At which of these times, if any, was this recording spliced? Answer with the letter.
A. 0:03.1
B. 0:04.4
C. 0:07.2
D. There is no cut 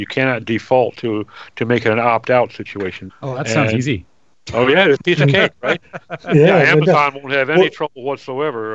A